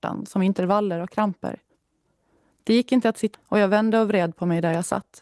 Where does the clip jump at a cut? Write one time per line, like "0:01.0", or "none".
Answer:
0:03.3